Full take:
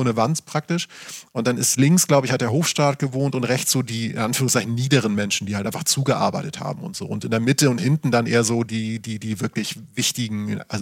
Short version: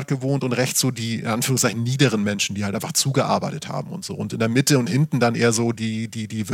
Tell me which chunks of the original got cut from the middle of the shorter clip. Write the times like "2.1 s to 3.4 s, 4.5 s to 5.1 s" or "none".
none